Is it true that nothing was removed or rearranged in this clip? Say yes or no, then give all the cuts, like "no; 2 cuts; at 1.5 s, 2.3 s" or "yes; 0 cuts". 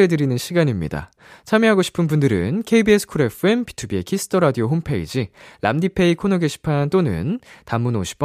no; 1 cut; at 1.3 s